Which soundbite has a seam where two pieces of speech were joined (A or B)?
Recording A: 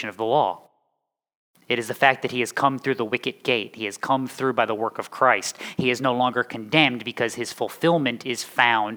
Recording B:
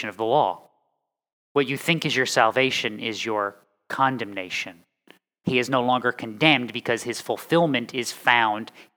B